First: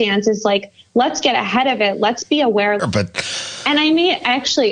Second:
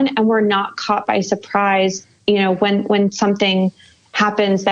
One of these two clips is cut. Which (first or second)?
first